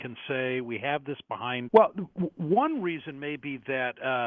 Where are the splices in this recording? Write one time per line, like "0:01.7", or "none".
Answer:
0:01.7